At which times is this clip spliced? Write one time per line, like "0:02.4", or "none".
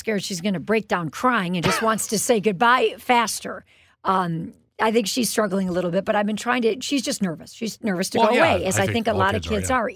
none